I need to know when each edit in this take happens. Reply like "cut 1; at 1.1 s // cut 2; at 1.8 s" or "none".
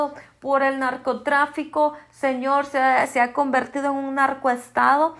none